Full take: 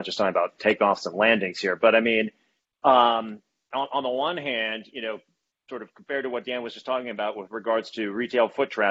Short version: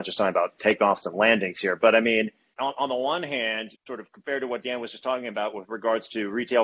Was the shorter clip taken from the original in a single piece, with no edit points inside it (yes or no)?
no